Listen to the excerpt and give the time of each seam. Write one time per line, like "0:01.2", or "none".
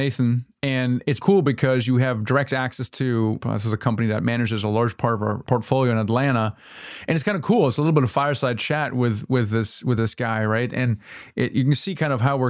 0:01.2
0:03.4